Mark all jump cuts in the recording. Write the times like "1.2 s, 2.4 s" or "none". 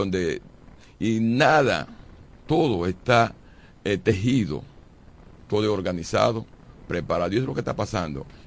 5.4 s